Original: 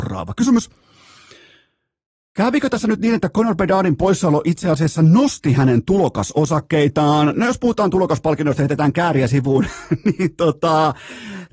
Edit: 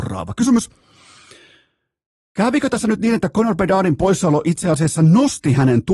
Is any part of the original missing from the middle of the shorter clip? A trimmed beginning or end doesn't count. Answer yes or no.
no